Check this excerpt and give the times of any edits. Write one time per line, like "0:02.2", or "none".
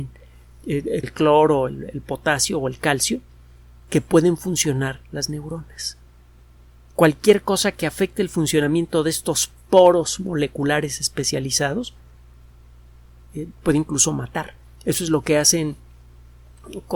0:01.0
0:13.5